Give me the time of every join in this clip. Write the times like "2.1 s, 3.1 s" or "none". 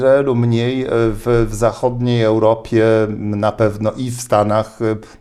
none

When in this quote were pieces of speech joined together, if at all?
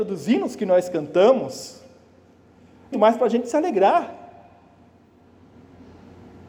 2.9 s

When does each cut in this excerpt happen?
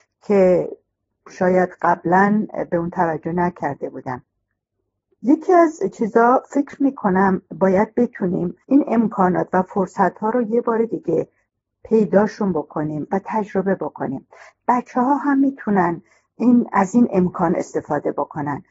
8.6 s

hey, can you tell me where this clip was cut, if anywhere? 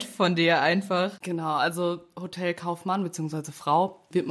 none

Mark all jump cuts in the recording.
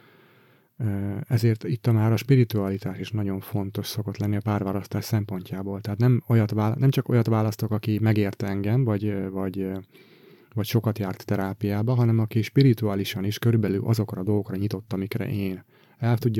none

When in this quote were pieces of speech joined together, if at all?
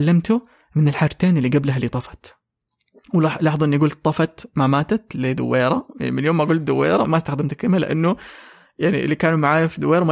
7.0 s

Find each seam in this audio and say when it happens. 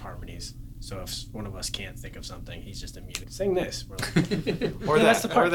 3.2 s

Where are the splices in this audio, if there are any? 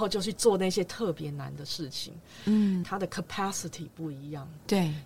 2.8 s

